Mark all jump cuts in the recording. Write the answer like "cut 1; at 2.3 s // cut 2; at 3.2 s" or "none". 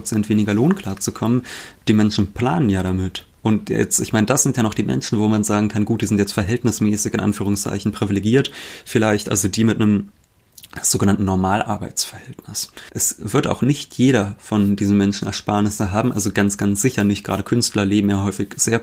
cut 1; at 12.9 s